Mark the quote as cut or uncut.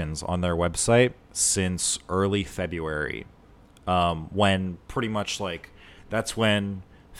uncut